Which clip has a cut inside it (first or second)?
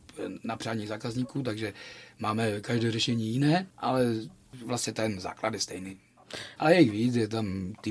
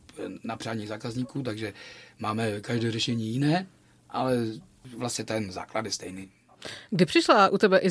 first